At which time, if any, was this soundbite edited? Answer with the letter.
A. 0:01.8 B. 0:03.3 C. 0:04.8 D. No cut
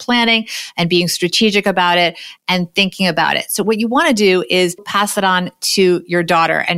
C